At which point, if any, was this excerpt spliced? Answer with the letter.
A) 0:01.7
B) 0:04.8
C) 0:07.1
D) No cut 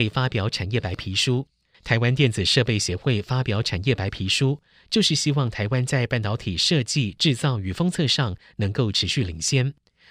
A